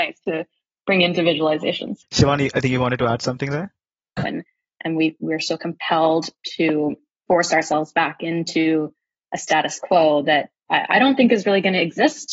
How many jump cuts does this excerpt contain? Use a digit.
2